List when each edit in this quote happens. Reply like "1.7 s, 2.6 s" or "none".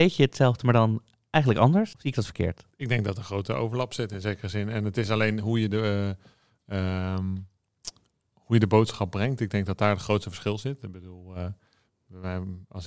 none